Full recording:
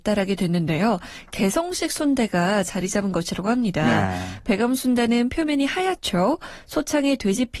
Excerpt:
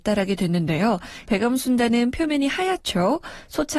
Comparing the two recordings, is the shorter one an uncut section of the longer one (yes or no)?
no